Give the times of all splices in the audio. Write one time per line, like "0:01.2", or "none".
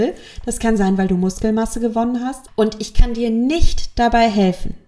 0:02.5